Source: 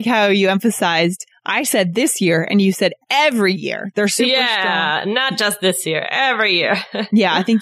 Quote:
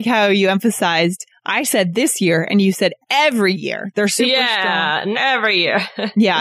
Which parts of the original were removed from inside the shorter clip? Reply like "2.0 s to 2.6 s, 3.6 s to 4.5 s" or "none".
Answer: 5.1 s to 6.1 s